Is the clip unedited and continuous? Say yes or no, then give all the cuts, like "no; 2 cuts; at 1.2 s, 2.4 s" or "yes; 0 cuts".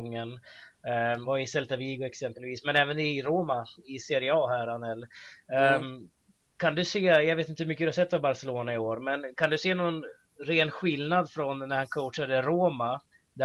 no; 1 cut; at 1.2 s